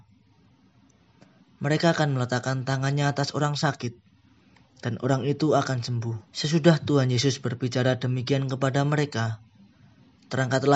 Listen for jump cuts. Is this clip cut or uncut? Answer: cut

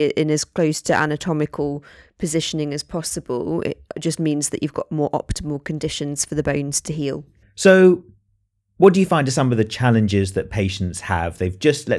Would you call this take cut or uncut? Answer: cut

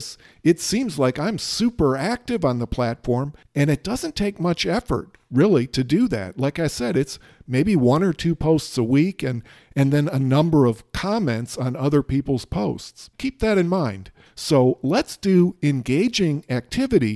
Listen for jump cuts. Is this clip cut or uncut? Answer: uncut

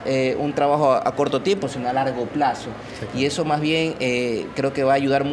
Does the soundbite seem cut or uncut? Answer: uncut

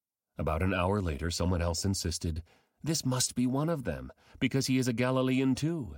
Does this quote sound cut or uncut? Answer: uncut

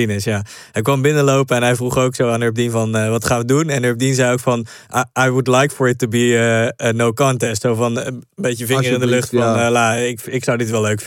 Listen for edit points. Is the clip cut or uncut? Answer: cut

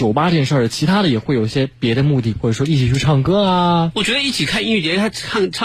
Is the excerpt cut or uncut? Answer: cut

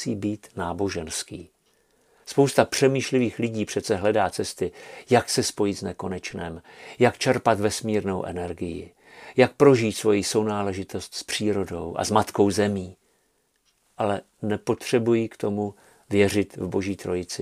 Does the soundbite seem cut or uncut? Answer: uncut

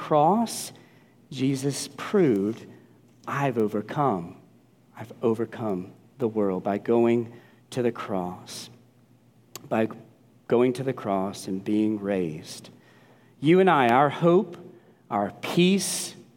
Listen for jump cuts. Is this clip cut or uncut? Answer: uncut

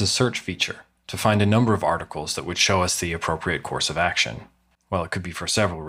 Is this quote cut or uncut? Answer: cut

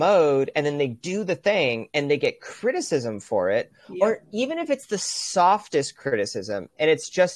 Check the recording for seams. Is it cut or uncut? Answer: uncut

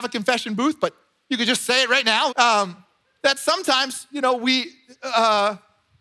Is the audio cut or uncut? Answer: cut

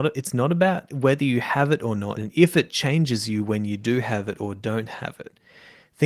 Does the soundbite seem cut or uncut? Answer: cut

